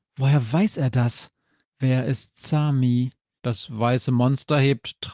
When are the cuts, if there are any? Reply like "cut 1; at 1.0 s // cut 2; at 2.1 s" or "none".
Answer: cut 1; at 1.6 s // cut 2; at 3.4 s